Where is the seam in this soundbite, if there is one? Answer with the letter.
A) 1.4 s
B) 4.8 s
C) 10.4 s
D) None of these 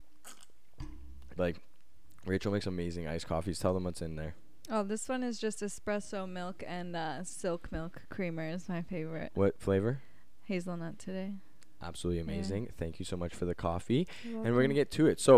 A